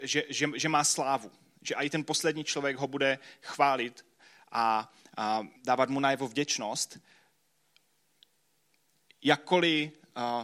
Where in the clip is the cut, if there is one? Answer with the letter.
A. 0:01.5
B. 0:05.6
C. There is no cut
B